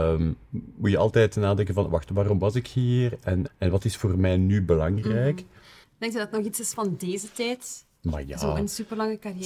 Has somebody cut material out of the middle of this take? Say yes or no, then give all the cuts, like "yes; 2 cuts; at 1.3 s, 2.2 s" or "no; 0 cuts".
yes; 3 cuts; at 3.5 s, 5.8 s, 7.9 s